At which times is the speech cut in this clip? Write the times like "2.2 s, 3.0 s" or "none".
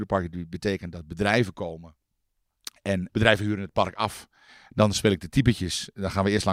3.1 s